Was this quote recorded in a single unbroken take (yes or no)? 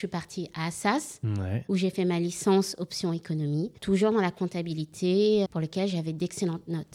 no